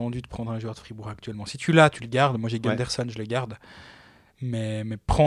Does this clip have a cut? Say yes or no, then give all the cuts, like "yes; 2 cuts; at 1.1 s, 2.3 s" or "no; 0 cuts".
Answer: no; 0 cuts